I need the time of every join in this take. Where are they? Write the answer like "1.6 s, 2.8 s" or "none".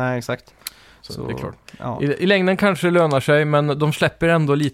none